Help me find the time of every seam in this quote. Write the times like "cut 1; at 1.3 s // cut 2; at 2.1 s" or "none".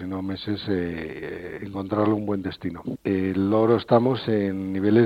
cut 1; at 2.9 s